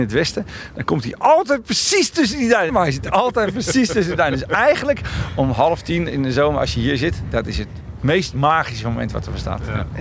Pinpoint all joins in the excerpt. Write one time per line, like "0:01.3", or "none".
0:02.7